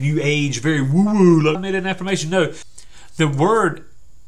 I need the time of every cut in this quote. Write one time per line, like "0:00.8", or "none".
0:01.5